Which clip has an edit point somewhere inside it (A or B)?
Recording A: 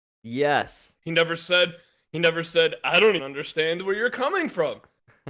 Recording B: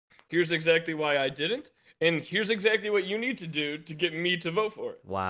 A